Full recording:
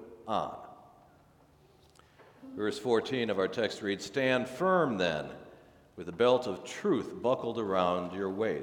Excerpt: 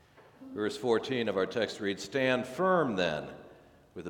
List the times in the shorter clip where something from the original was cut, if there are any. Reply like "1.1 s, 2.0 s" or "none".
none